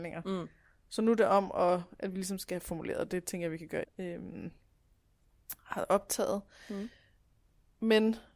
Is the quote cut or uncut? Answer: cut